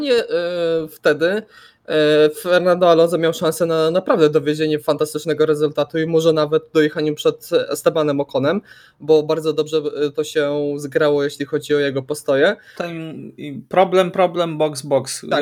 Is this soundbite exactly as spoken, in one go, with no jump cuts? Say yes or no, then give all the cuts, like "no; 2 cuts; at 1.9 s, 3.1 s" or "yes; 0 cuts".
no; 1 cut; at 12.8 s